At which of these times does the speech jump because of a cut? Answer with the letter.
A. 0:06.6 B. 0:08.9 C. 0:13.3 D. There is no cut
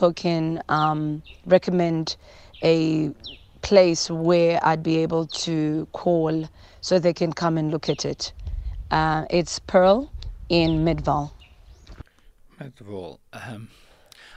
D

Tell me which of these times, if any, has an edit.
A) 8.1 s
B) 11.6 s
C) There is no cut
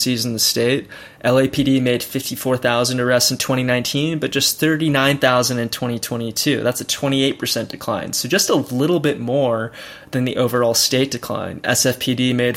C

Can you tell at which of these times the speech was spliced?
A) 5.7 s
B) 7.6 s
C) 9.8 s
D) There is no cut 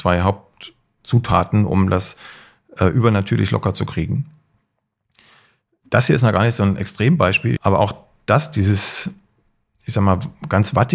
B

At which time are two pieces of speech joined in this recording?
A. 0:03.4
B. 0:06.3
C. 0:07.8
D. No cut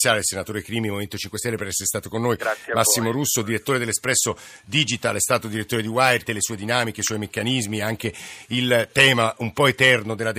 B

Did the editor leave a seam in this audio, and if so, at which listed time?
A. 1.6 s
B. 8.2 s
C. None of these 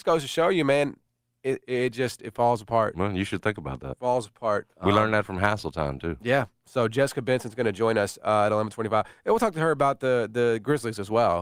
A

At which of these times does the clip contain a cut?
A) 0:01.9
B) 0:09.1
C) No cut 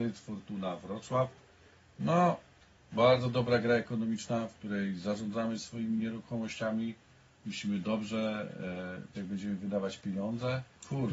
B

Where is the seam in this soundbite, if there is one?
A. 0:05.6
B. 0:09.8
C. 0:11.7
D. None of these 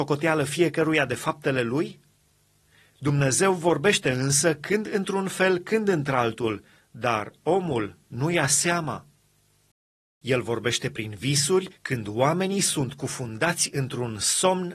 C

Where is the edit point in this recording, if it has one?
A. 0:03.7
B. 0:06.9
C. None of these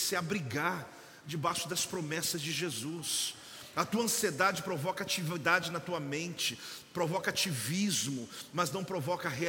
C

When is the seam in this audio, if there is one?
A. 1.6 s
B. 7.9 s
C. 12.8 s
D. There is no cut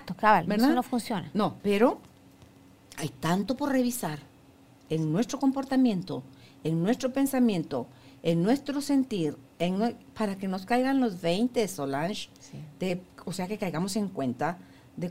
A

